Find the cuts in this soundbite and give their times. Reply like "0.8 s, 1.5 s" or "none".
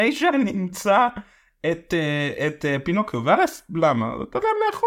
none